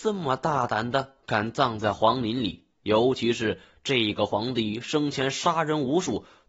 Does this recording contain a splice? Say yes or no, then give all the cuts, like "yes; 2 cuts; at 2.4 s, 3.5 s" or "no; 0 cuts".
no; 0 cuts